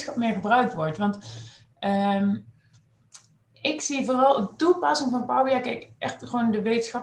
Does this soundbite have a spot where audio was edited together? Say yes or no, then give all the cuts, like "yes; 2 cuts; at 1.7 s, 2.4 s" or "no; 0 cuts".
no; 0 cuts